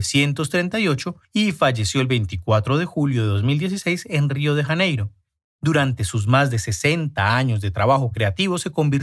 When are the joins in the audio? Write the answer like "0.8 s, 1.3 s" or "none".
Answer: none